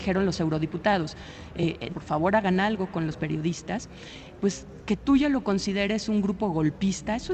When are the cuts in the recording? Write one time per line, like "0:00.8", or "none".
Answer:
0:01.9